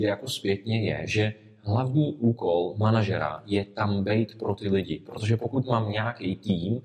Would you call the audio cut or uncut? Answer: uncut